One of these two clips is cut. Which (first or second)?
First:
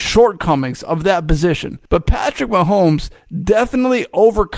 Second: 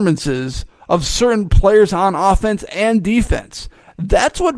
first